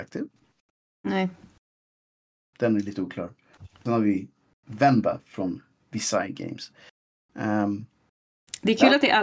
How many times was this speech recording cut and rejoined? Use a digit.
1